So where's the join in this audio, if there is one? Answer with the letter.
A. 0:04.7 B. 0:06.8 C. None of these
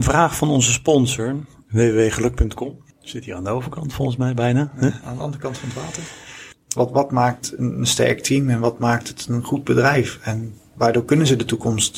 B